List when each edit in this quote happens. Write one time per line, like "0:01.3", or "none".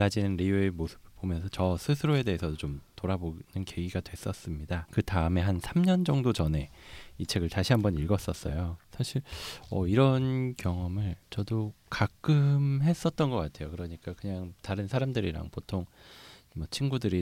0:04.9
0:08.8
0:11.2